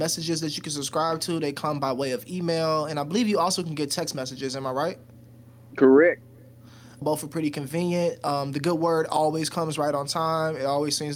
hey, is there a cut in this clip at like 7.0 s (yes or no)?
yes